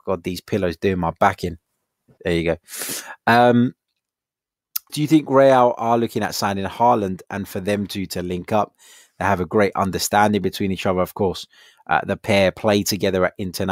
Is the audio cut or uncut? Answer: cut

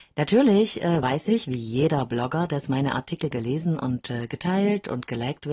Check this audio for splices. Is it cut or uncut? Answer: uncut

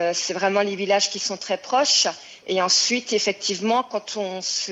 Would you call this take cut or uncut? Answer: uncut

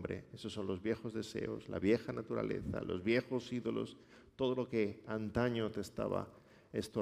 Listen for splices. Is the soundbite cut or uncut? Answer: uncut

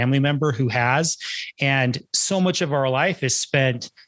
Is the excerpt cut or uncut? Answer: cut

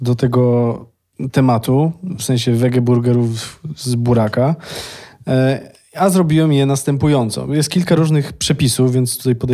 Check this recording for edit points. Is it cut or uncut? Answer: uncut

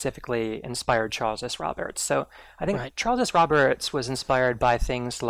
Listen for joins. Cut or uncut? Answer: uncut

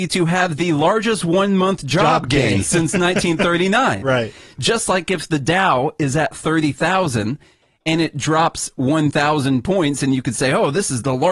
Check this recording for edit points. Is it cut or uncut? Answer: uncut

